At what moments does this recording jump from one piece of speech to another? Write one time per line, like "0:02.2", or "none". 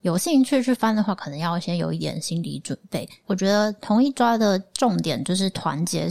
0:03.2

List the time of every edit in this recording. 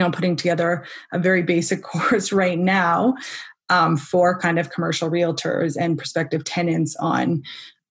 none

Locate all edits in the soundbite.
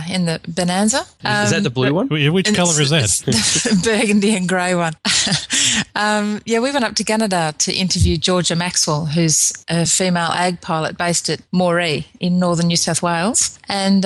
none

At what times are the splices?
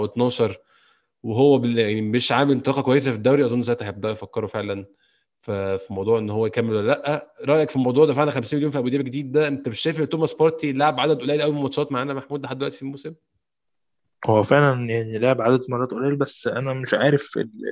none

